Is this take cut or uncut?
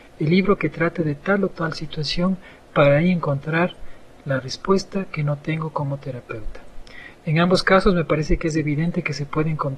uncut